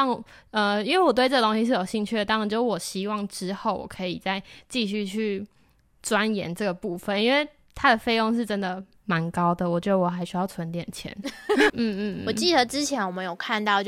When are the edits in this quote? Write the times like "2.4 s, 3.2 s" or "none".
11.7 s